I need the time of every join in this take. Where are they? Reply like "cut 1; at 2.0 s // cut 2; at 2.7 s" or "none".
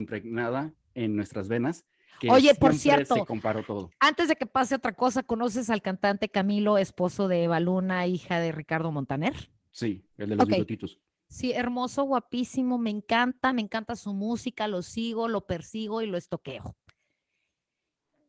none